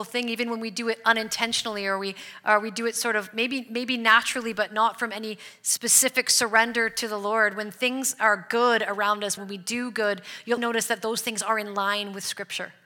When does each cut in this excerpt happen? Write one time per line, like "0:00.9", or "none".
0:09.4
0:10.6